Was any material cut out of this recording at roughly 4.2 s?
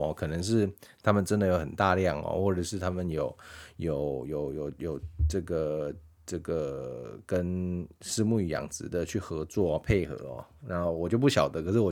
no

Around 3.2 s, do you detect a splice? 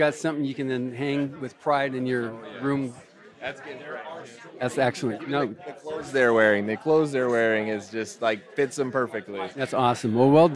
no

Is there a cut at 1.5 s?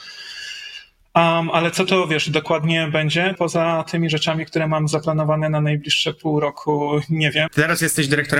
no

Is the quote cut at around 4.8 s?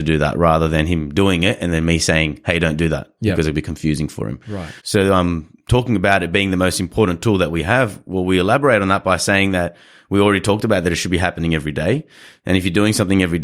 yes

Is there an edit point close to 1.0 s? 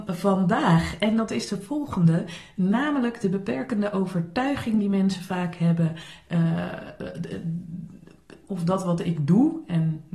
no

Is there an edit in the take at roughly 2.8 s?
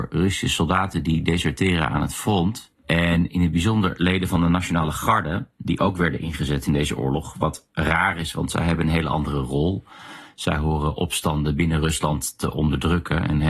yes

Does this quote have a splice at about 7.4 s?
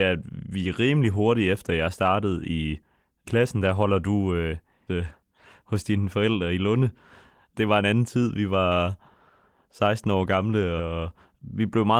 no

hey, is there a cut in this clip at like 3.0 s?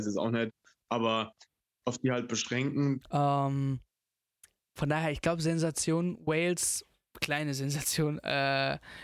yes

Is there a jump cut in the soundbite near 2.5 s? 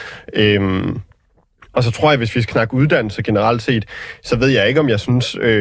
yes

